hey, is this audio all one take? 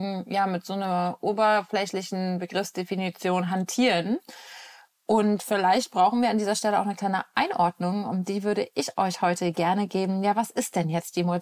yes; 0 cuts

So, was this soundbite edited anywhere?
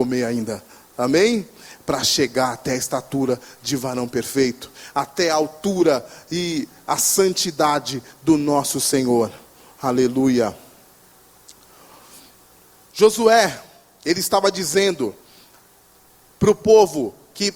no; 0 cuts

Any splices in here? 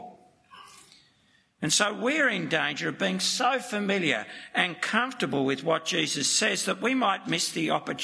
no; 0 cuts

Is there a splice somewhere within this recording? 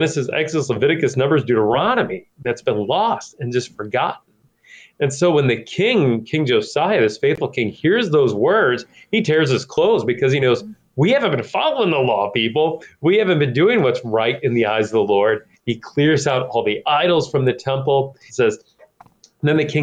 yes; 2 cuts; at 15.5 s, 18.3 s

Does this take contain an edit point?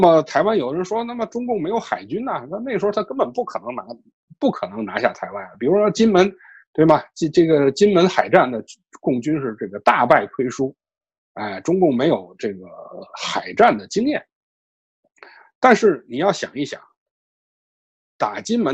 no; 0 cuts

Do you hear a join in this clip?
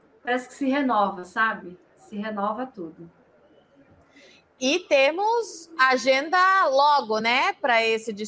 no; 0 cuts

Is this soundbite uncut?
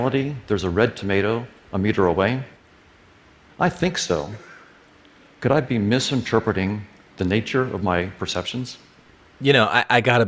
no; 1 cut; at 5.3 s

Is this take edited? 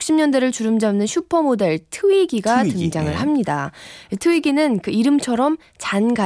no; 0 cuts

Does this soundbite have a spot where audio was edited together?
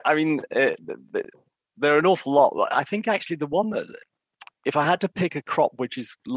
no; 0 cuts

